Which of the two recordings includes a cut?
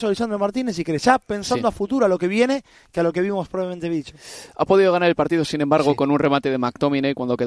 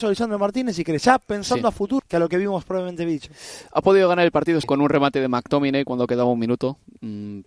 second; 2 cuts; at 2.0 s, 4.6 s

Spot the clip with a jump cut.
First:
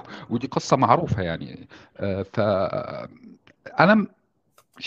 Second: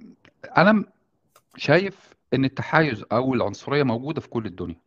second; 1 cut; at 2.2 s

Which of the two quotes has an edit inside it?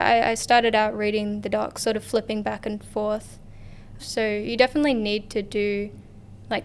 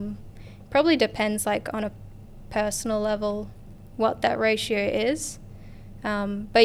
first; 1 cut; at 4.0 s

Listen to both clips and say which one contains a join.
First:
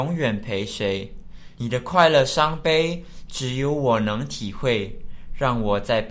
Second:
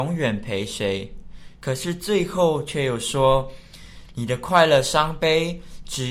first; 1 cut; at 1.6 s

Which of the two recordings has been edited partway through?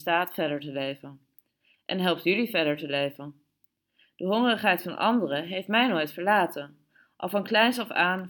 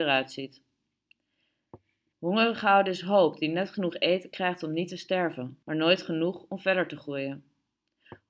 second; 2 cuts; at 2.1 s, 5.6 s

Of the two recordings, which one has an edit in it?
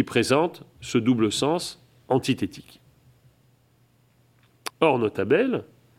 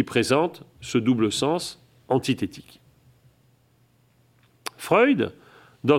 first; 1 cut; at 4.7 s

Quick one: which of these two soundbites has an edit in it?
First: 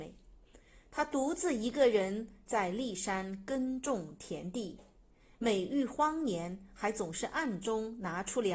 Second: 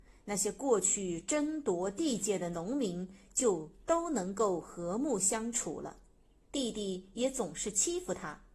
second; 1 cut; at 6.4 s

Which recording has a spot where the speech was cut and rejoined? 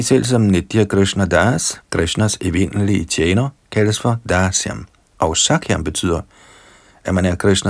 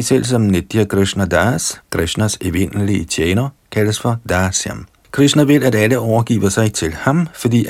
second; 1 cut; at 5.0 s

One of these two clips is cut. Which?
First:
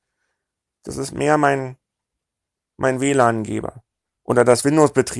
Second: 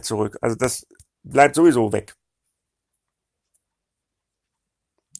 first; 1 cut; at 4.2 s

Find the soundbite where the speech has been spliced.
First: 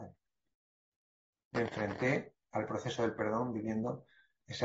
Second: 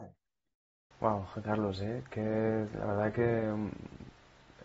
second; 1 cut; at 0.9 s

